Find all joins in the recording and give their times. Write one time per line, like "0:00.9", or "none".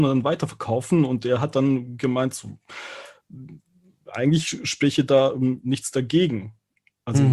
none